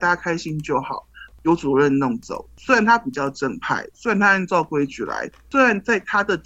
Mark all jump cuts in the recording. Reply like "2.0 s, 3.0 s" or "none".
1.3 s